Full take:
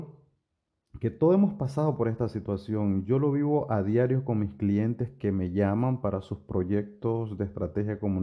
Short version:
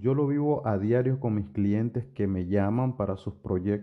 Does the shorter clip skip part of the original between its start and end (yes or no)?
no